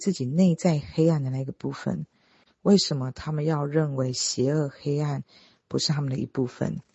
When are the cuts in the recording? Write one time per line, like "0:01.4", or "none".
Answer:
0:02.5